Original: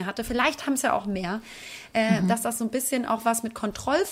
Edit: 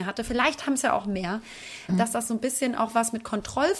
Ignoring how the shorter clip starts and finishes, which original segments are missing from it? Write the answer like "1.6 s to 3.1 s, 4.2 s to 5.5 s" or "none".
1.9 s to 2.2 s